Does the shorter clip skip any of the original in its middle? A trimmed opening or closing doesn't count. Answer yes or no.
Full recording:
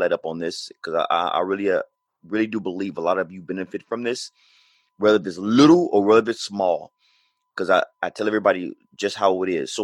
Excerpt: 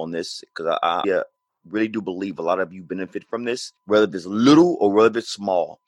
yes